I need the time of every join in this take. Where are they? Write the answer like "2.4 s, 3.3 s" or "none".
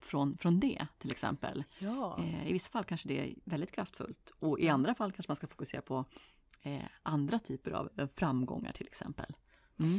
none